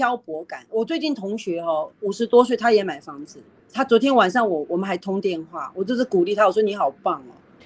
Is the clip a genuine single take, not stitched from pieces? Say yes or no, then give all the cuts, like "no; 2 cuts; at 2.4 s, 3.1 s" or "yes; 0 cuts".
yes; 0 cuts